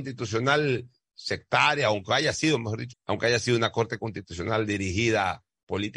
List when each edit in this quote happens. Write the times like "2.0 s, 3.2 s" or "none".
2.9 s